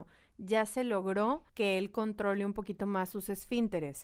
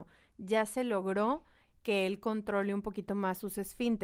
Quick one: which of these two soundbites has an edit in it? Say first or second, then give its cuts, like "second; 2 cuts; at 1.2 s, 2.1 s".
first; 1 cut; at 1.5 s